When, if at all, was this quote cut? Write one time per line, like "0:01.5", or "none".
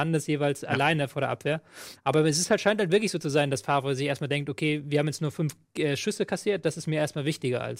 0:02.0